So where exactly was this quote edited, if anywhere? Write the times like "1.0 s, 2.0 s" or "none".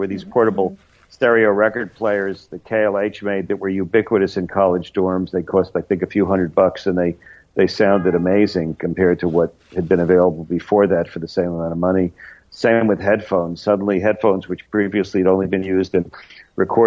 none

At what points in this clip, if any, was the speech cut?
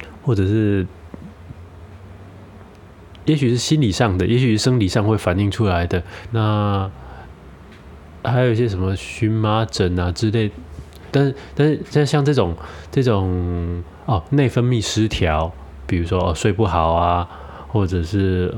6.3 s, 11.1 s

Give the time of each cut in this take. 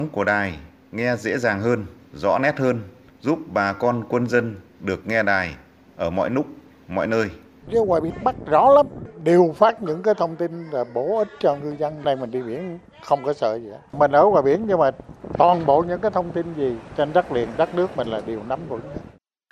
7.6 s

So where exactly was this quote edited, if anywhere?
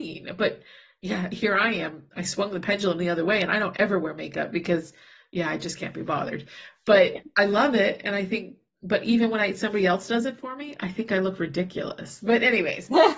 12.2 s

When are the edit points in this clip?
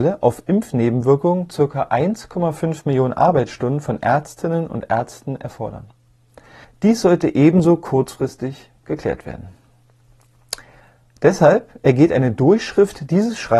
6.6 s

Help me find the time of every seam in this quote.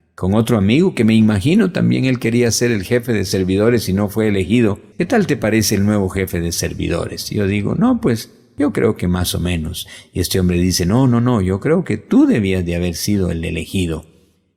4.9 s

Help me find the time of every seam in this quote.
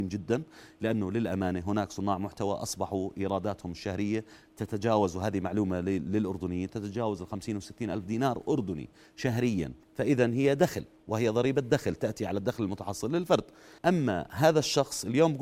9.8 s, 13.8 s

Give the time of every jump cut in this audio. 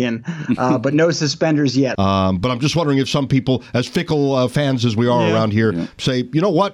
1.9 s

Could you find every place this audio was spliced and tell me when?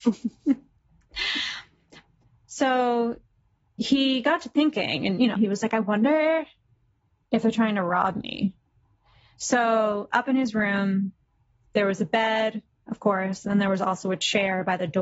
5.3 s

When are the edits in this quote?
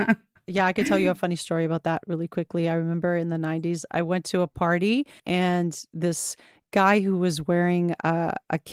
none

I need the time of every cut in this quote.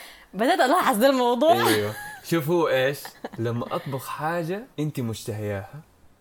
4.7 s

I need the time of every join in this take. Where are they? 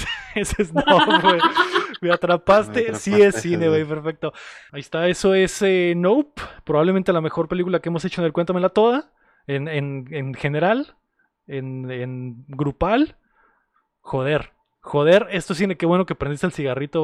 4.7 s

